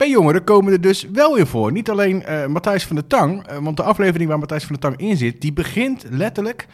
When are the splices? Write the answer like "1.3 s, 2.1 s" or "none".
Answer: none